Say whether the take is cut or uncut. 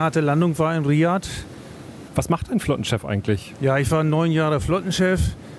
cut